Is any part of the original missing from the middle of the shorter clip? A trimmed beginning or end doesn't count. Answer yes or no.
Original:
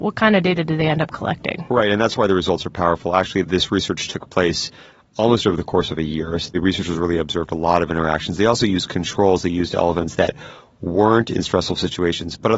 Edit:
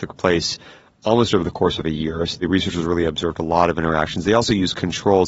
no